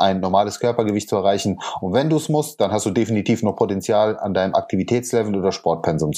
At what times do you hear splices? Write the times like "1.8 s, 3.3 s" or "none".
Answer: none